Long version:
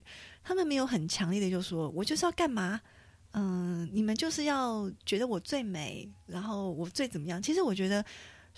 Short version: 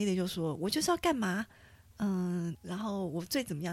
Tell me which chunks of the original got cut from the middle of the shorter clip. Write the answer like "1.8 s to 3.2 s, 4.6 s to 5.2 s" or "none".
3.9 s to 6.2 s